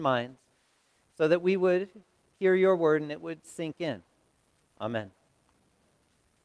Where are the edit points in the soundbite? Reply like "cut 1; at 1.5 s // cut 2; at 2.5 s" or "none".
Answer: cut 1; at 4.6 s